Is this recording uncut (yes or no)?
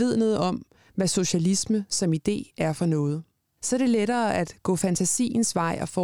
yes